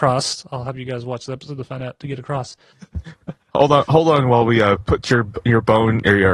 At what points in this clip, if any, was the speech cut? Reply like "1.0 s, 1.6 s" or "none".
2.7 s